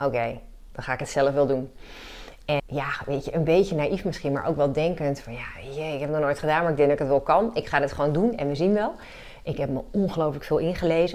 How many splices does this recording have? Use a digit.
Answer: 1